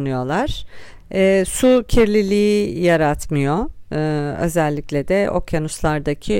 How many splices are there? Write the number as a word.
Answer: one